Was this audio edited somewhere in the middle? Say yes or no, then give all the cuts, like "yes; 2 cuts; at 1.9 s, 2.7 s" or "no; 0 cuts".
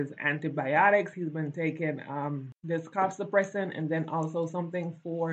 no; 0 cuts